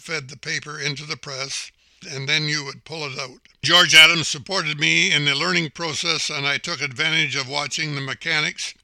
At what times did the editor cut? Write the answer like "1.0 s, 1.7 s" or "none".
2.0 s, 3.6 s